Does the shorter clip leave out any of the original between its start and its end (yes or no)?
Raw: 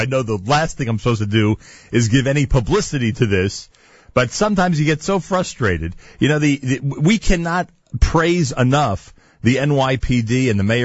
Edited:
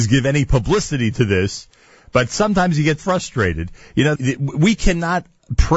yes